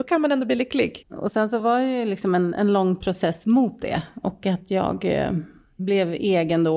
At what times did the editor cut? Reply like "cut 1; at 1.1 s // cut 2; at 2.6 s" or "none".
cut 1; at 1.0 s // cut 2; at 4.2 s

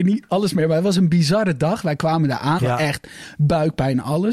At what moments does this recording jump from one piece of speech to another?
cut 1; at 2.6 s

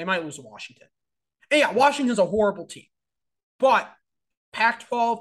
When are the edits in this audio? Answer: none

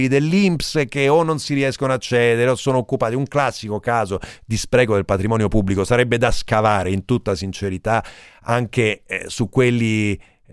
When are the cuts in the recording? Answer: none

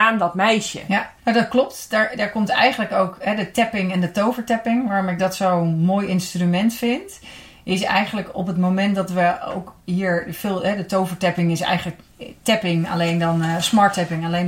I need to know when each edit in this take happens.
cut 1; at 1.2 s

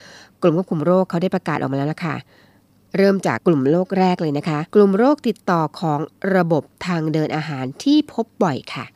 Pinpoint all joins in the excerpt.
cut 1; at 3.4 s // cut 2; at 4.7 s

